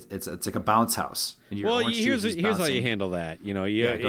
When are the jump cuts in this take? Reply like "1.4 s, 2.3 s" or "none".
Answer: none